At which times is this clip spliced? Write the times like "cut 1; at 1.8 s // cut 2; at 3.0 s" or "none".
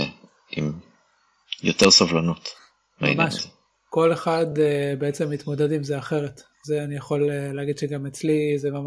none

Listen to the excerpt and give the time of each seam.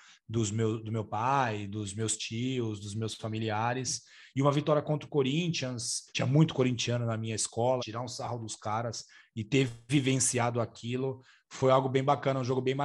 cut 1; at 6.1 s // cut 2; at 7.8 s

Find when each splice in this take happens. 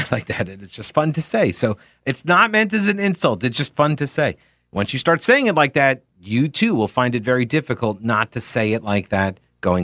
none

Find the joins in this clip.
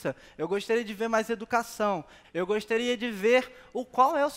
cut 1; at 2.2 s

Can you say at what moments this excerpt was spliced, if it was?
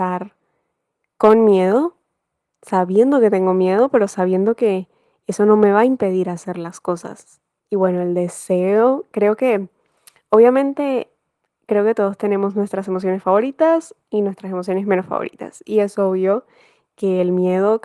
cut 1; at 7.6 s

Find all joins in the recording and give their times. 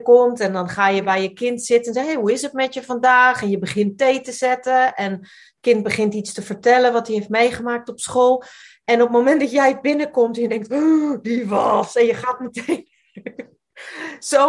none

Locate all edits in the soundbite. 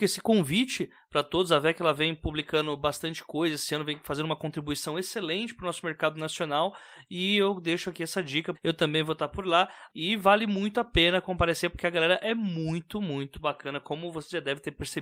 cut 1; at 8.5 s // cut 2; at 9.9 s // cut 3; at 13.3 s

